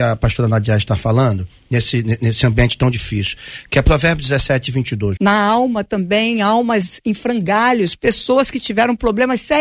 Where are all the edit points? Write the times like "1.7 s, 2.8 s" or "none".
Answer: 5.2 s